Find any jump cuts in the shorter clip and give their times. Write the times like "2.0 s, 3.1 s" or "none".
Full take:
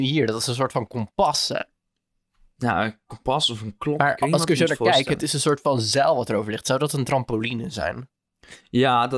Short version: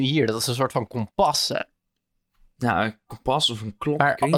none